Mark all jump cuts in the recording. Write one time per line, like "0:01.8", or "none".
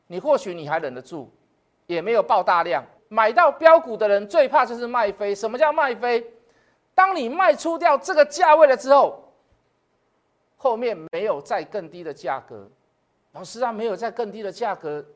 0:03.0